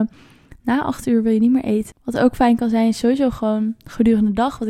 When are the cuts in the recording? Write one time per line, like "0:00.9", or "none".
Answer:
0:01.9